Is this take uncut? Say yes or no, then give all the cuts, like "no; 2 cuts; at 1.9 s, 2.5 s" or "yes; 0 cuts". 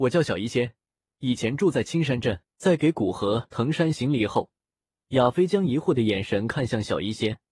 no; 1 cut; at 2.4 s